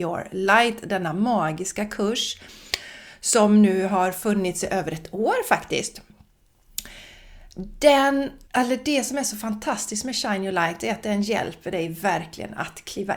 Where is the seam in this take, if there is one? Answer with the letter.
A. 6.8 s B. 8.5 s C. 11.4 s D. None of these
B